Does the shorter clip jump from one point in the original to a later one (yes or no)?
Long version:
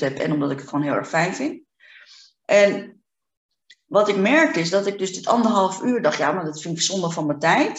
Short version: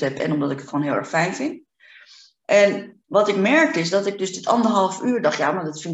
yes